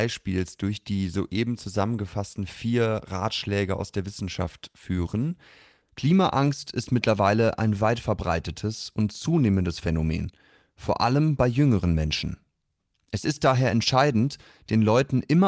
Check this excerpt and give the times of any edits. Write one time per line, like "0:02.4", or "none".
0:05.8